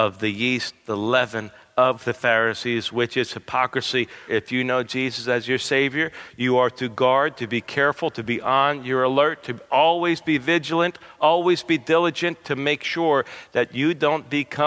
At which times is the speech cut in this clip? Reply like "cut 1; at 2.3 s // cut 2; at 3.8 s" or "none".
cut 1; at 4.3 s